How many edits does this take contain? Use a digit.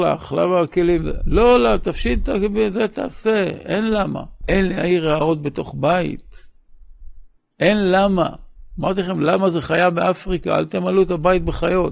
1